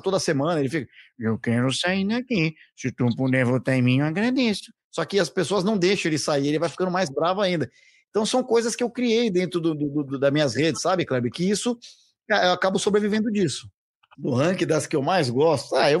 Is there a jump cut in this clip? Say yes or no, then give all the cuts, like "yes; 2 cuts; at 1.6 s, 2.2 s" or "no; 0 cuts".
yes; 1 cut; at 14.1 s